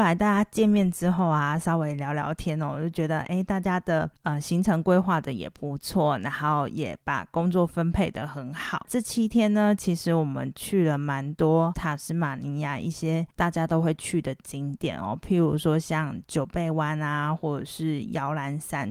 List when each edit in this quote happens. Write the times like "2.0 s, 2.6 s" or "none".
none